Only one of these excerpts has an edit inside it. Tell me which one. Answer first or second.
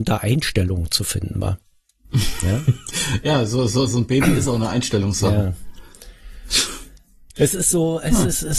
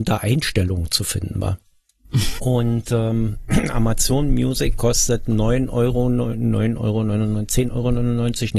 second